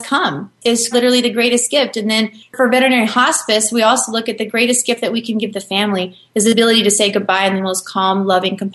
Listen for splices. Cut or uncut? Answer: cut